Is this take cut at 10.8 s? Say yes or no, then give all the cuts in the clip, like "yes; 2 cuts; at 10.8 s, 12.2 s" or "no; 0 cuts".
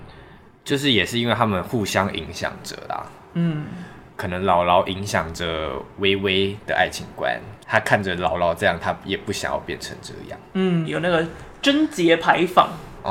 yes; 1 cut; at 10.8 s